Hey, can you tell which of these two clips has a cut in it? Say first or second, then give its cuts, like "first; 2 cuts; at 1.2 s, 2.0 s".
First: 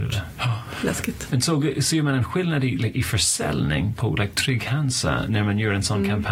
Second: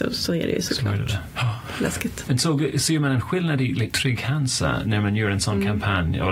second; 1 cut; at 3.9 s